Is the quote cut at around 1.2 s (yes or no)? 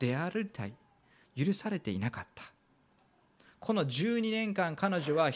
yes